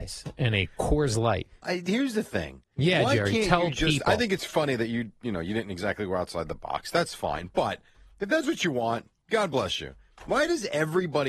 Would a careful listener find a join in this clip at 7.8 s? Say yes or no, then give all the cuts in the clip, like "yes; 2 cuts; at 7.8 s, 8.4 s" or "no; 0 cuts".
no; 2 cuts; at 1.6 s, 9.2 s